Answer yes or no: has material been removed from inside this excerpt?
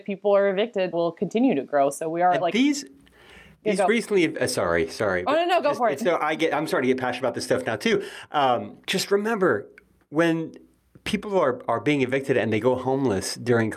yes